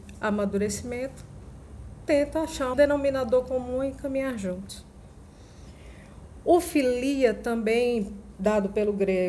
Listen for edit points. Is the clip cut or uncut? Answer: cut